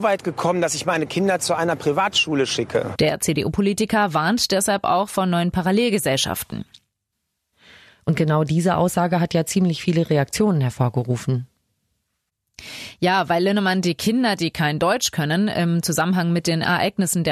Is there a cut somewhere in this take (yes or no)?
no